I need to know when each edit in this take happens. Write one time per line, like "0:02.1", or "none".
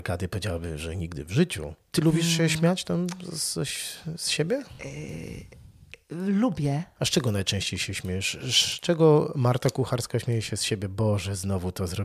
none